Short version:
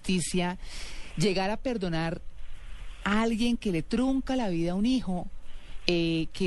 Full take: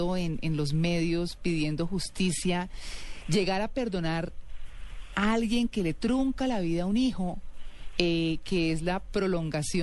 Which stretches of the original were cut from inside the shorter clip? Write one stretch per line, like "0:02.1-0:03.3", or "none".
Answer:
none